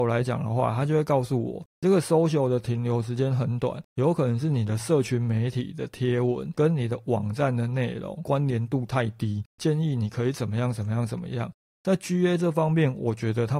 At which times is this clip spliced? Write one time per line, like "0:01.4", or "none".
none